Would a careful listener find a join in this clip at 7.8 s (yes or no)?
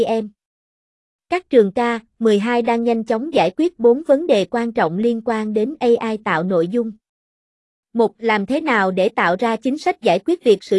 no